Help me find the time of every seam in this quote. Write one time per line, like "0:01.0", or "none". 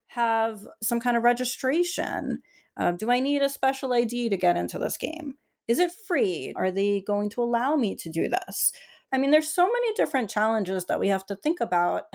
0:06.6
0:09.1